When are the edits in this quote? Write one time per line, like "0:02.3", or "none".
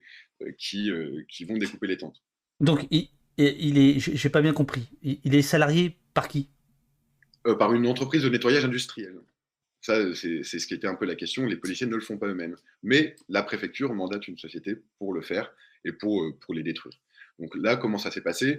0:02.6
0:09.6